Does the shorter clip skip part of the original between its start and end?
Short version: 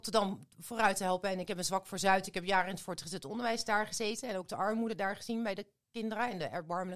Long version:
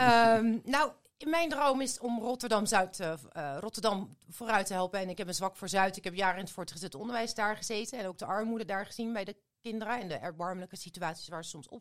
no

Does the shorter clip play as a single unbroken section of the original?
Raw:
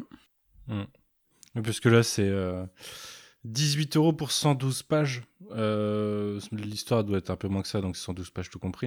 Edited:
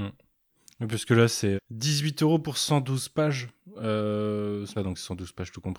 no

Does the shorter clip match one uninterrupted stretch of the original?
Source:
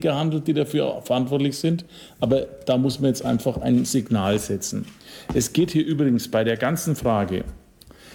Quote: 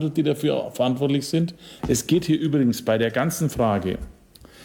no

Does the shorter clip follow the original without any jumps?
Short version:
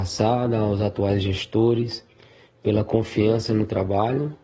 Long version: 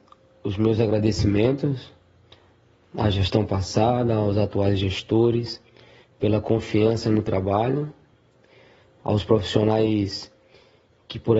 yes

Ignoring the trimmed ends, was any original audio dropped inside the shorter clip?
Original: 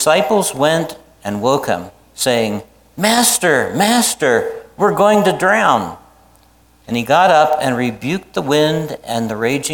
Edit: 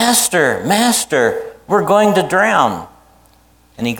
no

